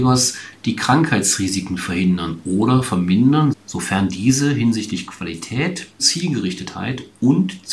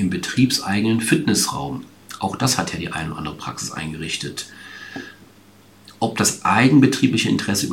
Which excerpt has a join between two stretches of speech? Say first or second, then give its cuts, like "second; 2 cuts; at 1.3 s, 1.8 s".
first; 2 cuts; at 3.5 s, 6.0 s